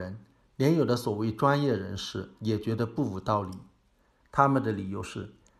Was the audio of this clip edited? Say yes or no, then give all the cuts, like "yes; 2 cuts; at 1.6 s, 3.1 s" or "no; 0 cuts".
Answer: yes; 1 cut; at 4.2 s